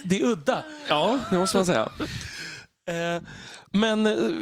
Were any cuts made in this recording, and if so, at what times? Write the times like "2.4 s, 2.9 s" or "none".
none